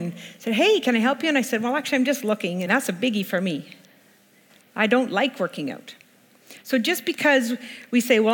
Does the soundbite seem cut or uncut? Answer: cut